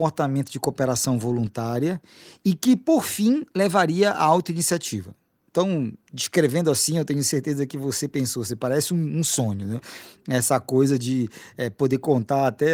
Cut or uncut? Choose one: uncut